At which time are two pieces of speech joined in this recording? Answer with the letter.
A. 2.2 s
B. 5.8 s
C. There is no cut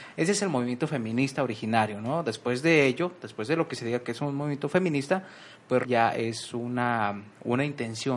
B